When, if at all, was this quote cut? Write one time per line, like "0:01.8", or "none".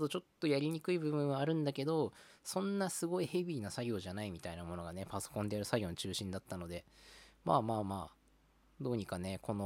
none